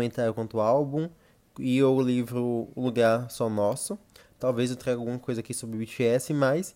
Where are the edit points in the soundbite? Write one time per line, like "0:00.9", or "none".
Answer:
none